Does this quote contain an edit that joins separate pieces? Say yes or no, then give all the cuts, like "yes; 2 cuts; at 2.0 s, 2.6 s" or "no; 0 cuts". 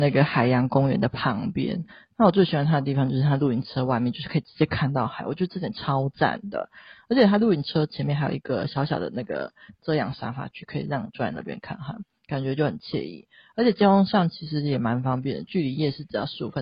no; 0 cuts